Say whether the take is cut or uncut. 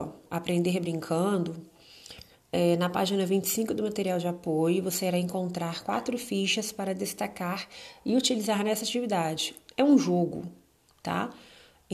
uncut